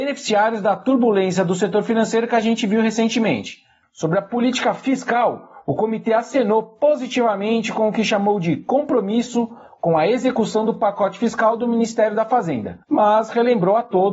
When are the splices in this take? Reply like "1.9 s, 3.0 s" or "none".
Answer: 3.8 s, 12.8 s